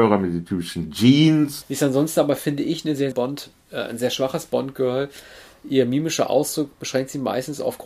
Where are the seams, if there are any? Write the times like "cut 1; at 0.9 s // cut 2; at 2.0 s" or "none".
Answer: cut 1; at 1.6 s // cut 2; at 3.1 s